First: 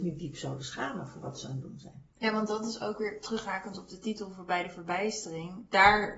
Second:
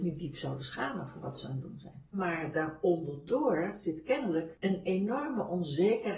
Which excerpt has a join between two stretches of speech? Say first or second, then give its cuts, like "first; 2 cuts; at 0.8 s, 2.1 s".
second; 1 cut; at 2.1 s